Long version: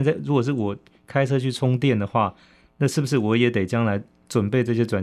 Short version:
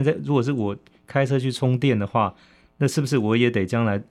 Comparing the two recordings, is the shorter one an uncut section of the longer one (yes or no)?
yes